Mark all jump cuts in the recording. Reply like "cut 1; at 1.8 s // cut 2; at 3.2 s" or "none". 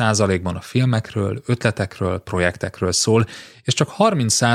none